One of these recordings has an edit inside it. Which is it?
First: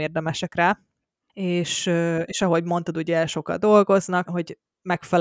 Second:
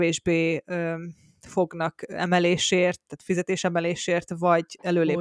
first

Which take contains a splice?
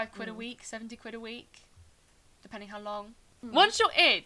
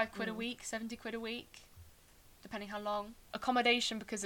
second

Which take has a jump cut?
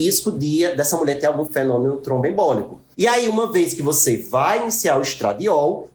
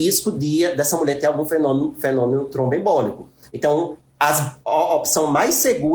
first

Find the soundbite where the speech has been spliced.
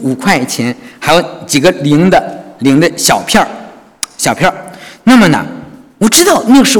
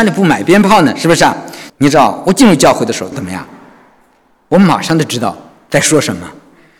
second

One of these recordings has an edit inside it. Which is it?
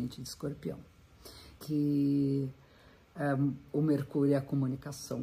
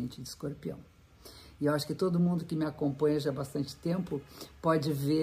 first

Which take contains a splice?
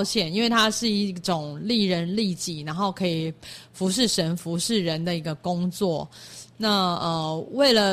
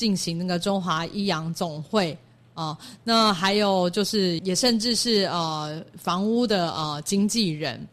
second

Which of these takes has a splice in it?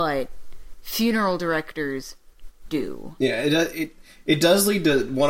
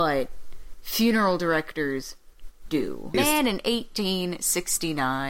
second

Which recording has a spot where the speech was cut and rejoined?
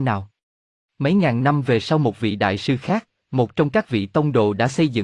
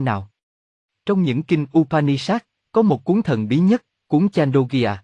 first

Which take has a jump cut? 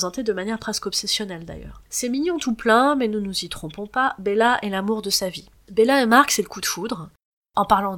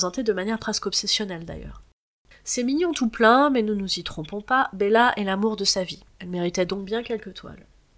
first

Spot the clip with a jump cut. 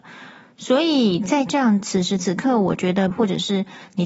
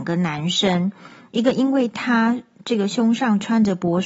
first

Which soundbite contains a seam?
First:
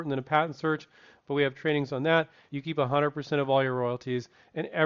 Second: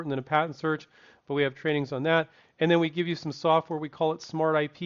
first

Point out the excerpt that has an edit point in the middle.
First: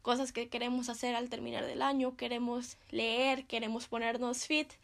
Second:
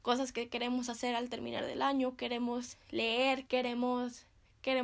second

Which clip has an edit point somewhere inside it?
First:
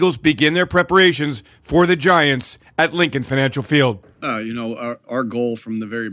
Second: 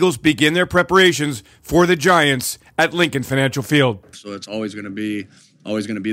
second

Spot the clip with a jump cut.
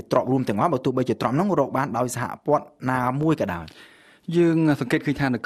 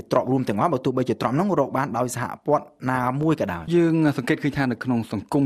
second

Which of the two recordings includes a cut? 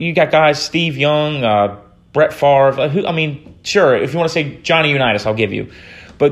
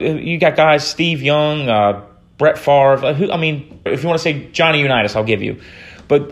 second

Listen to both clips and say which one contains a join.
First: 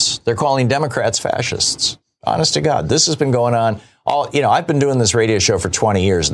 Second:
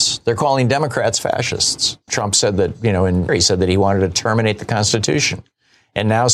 second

